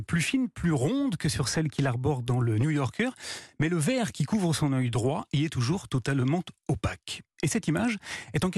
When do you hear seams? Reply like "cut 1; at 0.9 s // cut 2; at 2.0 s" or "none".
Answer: none

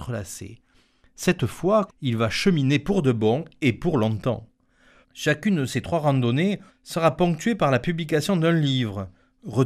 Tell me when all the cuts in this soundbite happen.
cut 1; at 1.9 s // cut 2; at 5.0 s // cut 3; at 6.7 s

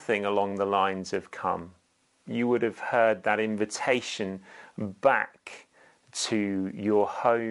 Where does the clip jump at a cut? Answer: none

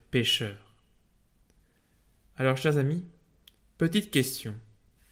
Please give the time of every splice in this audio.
none

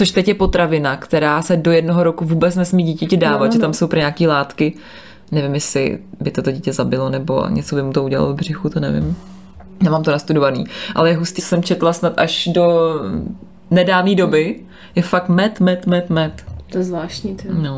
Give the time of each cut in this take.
cut 1; at 11.4 s // cut 2; at 15.5 s

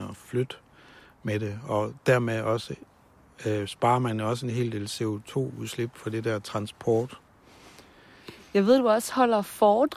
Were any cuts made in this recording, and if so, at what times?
none

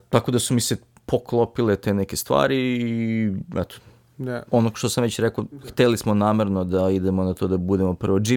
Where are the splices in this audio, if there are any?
cut 1; at 4.5 s

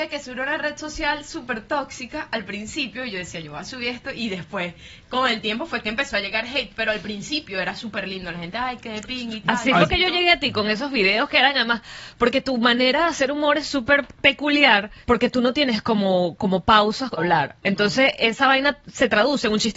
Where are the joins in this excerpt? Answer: cut 1; at 15.0 s // cut 2; at 17.2 s

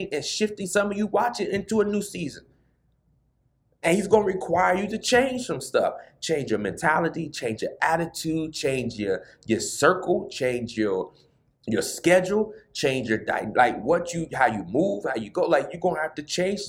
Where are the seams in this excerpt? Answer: none

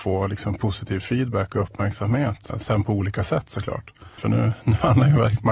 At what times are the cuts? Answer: cut 1; at 2.5 s // cut 2; at 4.2 s

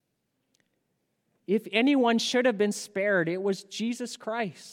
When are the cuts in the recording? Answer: cut 1; at 1.4 s

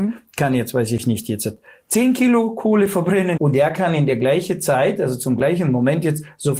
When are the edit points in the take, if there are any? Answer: cut 1; at 3.4 s

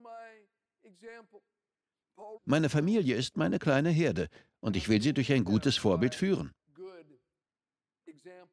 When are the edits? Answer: cut 1; at 2.4 s

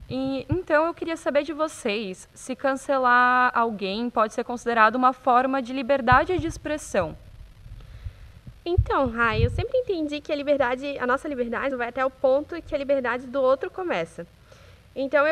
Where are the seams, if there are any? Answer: cut 1; at 11.7 s

